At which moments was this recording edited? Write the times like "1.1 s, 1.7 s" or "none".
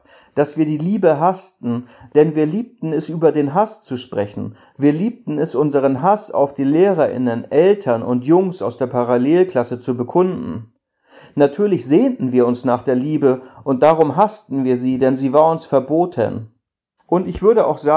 17.0 s